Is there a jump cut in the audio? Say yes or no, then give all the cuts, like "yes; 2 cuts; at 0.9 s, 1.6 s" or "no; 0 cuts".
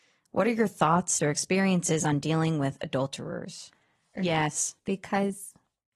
yes; 2 cuts; at 1.2 s, 4.2 s